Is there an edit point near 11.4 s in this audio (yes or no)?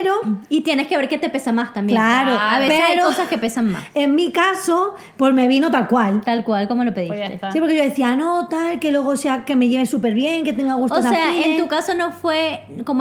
no